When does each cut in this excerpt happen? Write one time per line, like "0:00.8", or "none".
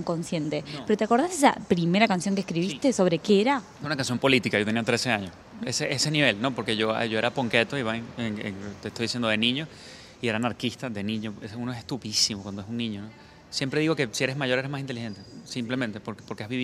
none

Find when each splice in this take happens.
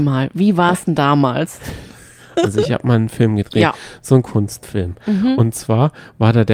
none

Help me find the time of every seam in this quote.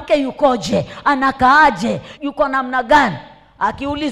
0:02.2

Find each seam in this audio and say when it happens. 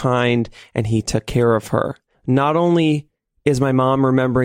0:02.1

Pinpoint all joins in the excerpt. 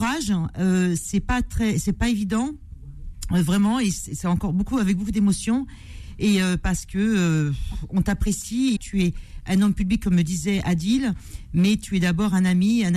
0:08.8

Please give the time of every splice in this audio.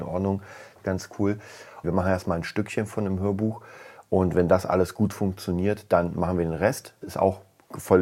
0:01.8
0:07.0

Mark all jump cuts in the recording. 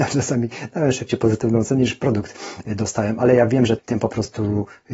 0:03.8

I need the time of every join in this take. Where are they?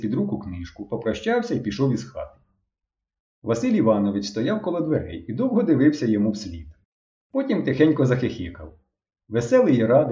none

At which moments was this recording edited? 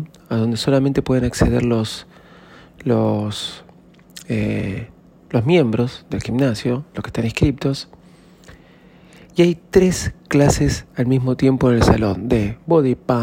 none

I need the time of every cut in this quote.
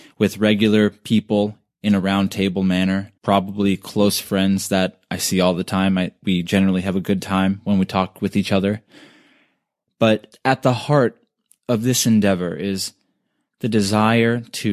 0:03.2
0:10.3

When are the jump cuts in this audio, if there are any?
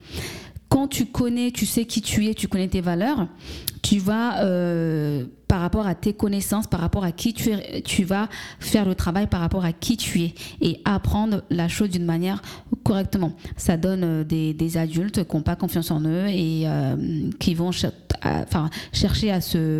0:13.6

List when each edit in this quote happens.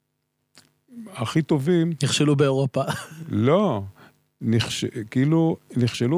none

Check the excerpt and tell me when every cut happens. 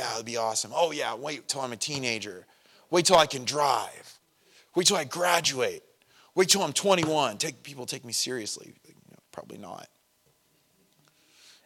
none

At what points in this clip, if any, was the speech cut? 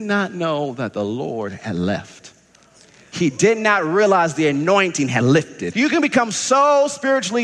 0:05.7

